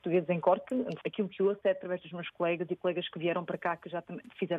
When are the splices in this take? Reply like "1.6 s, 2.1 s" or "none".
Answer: 1.0 s

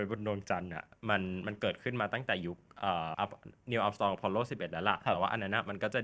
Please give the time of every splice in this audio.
3.1 s

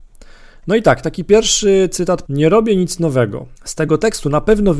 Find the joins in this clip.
2.3 s, 3.6 s

